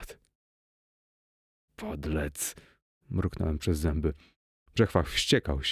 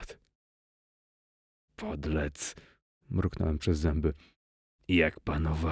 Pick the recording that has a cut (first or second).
first